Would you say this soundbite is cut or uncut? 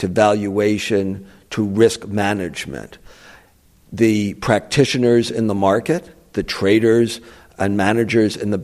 uncut